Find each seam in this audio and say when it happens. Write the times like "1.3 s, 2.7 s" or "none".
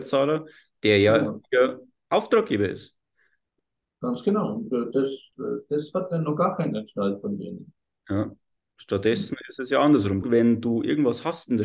10.2 s